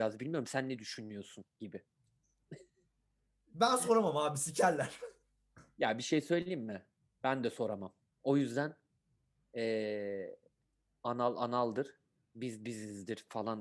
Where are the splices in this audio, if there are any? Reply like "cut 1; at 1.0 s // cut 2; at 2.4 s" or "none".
none

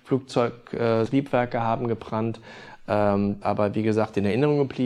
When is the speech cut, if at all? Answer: cut 1; at 1.1 s // cut 2; at 3.4 s

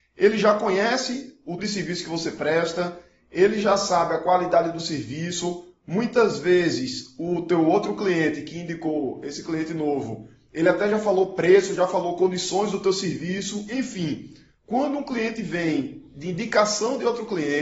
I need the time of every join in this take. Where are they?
cut 1; at 1.6 s

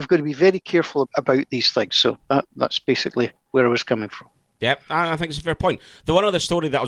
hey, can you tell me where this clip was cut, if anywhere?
cut 1; at 1.0 s

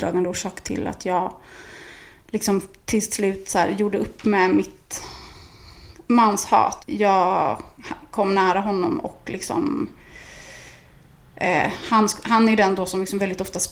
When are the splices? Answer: cut 1; at 6.8 s

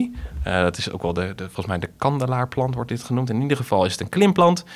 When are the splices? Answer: none

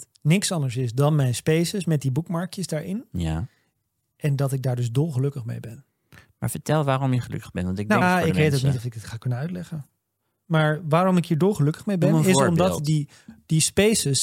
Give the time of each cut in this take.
cut 1; at 8.0 s

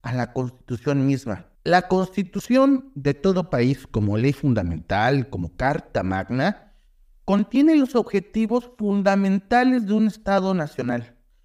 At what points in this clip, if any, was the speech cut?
cut 1; at 1.5 s

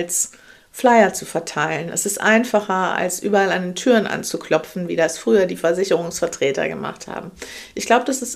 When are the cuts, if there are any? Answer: none

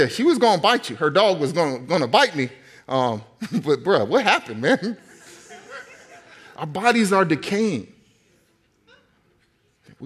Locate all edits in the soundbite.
none

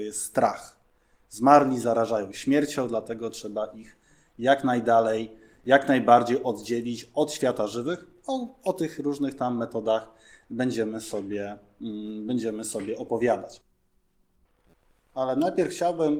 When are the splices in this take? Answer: none

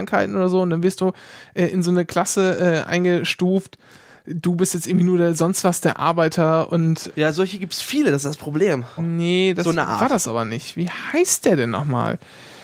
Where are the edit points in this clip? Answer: cut 1; at 7.1 s // cut 2; at 9.0 s

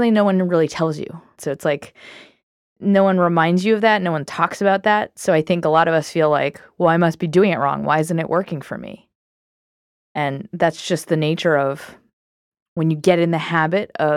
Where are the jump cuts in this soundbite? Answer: cut 1; at 1.4 s

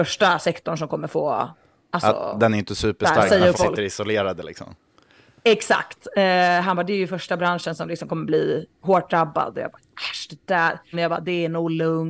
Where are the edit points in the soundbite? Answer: cut 1; at 3.5 s // cut 2; at 10.9 s

